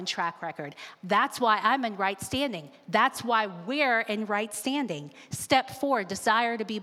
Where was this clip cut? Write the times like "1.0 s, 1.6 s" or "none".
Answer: 1.0 s